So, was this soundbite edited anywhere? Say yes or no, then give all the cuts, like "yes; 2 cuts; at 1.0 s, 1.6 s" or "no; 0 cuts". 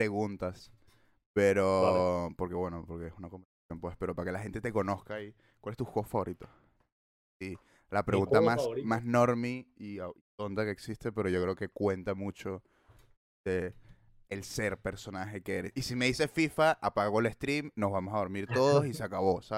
no; 0 cuts